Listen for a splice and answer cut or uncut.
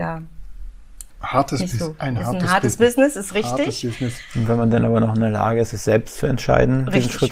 uncut